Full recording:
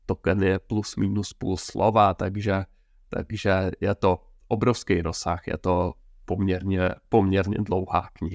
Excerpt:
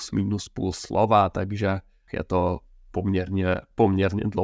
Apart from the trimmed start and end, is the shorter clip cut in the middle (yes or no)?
yes